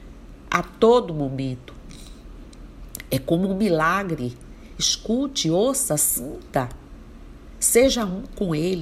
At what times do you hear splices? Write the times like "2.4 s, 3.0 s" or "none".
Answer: none